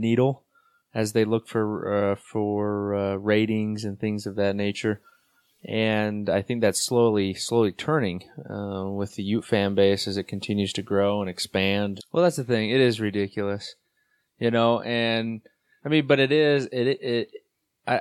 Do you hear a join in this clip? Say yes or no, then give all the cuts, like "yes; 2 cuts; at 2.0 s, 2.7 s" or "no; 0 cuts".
yes; 1 cut; at 12.0 s